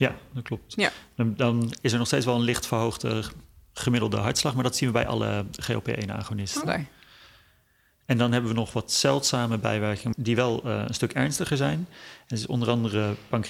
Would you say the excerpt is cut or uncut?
uncut